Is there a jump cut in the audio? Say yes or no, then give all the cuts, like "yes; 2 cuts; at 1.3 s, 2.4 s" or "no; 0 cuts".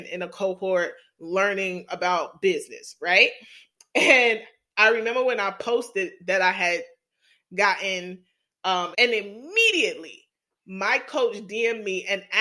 yes; 1 cut; at 8.9 s